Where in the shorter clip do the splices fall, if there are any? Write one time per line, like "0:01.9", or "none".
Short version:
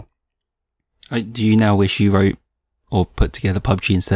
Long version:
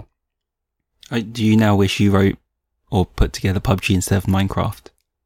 none

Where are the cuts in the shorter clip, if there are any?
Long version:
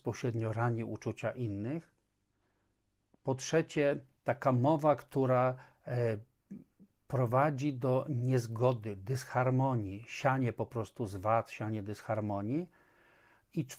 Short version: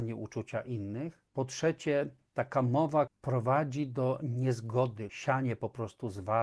0:01.3
0:03.1
0:05.1

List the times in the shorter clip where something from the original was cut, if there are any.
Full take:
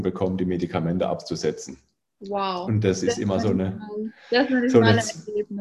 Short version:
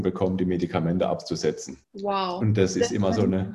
0:01.8

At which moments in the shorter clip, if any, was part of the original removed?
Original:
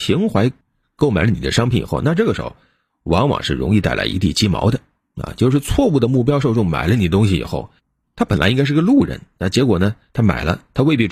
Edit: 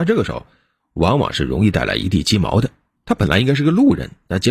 0:03.0

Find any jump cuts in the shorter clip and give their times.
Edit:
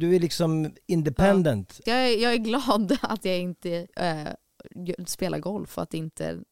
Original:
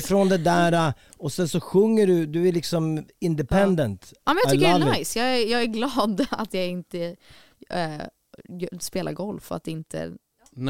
0:01.9
0:03.9

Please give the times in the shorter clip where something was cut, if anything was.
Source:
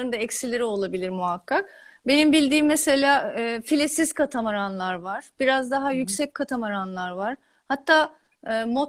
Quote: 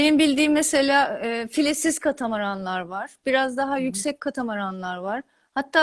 none

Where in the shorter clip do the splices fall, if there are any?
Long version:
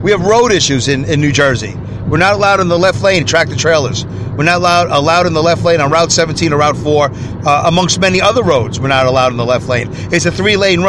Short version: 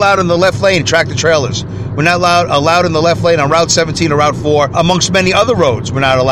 0:04.7

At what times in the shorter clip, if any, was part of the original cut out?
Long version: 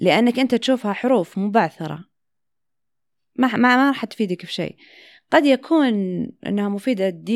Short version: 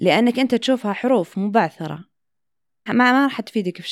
0:02.9

